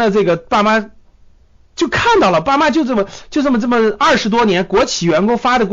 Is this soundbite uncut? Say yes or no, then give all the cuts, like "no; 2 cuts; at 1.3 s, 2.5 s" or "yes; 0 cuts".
yes; 0 cuts